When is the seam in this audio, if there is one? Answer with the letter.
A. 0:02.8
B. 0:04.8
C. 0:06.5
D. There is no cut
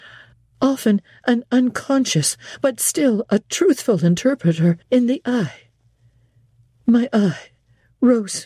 B